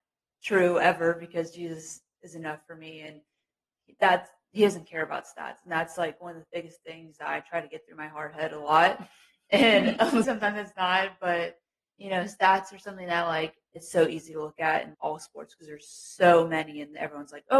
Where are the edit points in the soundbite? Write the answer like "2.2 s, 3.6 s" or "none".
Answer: 10.2 s, 14.9 s